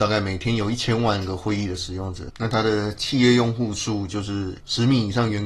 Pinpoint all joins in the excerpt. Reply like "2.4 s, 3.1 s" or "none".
2.3 s

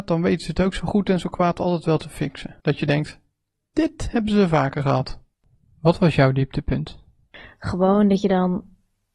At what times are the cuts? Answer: none

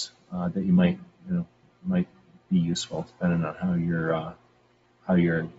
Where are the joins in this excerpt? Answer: none

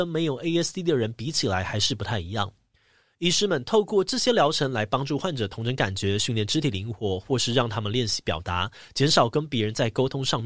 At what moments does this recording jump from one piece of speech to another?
3.0 s

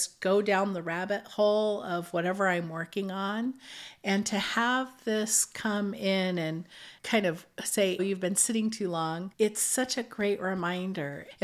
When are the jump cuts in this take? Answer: 8.0 s

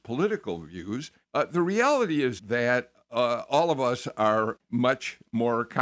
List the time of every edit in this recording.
1.2 s, 2.4 s, 4.6 s

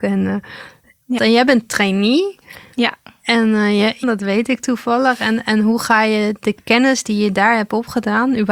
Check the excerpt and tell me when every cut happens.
1.2 s, 4.0 s

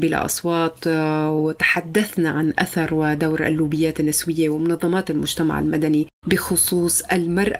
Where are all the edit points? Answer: 6.2 s

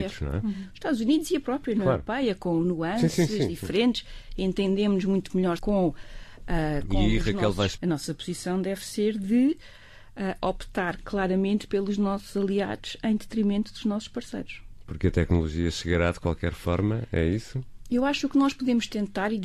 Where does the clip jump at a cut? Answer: 5.6 s, 7.8 s

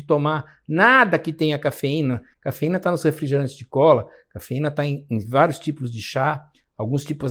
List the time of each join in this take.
2.3 s

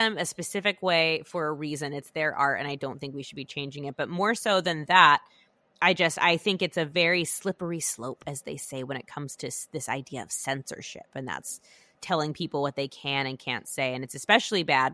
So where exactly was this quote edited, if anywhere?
11.9 s

